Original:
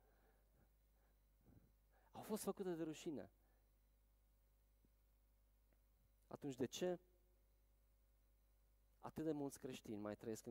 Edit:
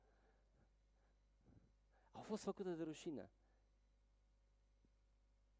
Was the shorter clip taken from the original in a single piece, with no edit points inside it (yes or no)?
yes